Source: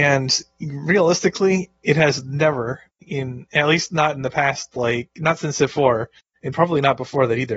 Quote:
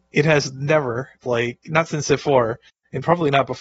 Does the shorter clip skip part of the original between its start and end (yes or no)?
yes